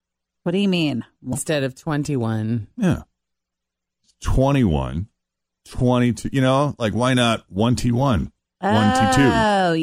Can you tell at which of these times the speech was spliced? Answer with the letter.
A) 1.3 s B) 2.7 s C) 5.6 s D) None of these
A